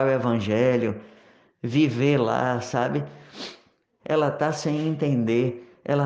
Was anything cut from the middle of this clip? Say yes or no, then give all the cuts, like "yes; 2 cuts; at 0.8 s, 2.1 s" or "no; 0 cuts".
yes; 1 cut; at 4.0 s